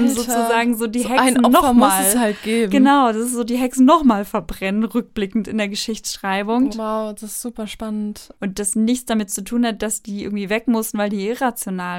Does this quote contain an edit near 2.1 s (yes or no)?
no